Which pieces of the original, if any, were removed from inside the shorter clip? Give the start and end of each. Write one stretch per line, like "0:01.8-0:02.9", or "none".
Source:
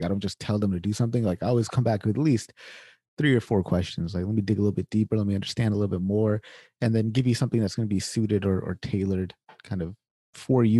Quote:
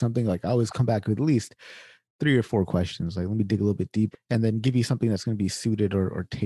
0:05.1-0:06.6